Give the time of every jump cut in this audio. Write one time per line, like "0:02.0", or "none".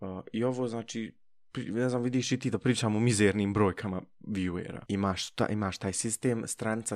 0:04.9